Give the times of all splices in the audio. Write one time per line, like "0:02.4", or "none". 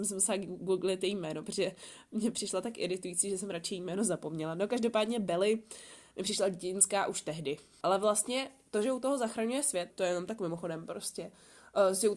0:07.8
0:09.9